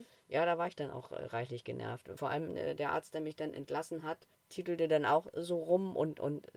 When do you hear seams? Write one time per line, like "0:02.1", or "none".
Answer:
none